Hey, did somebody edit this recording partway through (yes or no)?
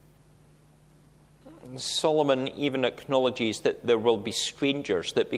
no